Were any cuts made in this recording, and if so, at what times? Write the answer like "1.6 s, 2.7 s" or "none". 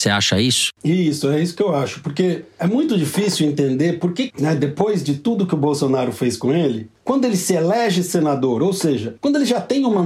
4.3 s